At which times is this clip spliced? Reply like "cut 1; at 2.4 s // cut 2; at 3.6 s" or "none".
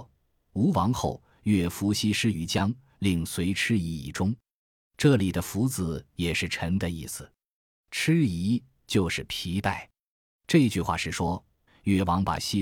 cut 1; at 11.7 s